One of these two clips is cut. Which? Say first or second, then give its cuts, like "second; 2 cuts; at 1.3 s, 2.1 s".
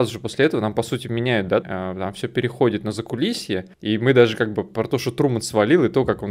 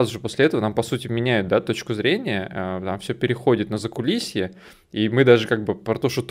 first; 2 cuts; at 1.6 s, 3.7 s